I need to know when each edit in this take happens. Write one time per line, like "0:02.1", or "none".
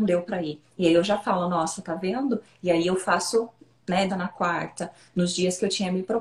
0:04.1